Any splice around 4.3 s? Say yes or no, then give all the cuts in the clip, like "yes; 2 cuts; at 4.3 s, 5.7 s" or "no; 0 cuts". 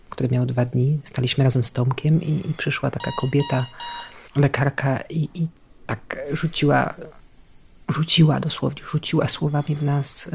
yes; 1 cut; at 4.3 s